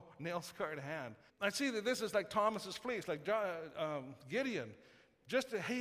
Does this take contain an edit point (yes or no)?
yes